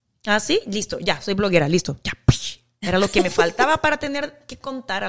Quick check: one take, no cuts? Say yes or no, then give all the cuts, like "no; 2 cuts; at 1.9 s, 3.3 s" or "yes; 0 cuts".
yes; 0 cuts